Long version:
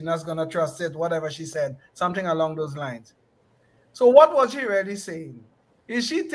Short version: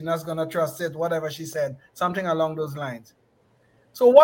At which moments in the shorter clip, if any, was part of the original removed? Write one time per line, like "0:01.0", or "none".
none